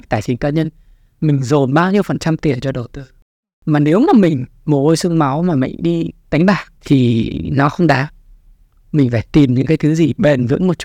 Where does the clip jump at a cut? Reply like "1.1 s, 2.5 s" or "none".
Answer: 6.8 s